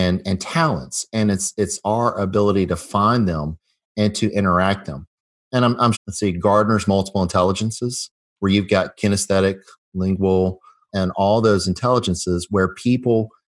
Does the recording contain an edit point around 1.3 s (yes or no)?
no